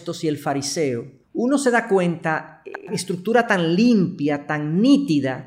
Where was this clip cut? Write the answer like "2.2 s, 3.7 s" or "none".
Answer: 1.2 s